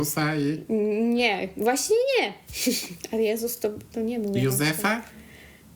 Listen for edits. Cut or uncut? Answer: uncut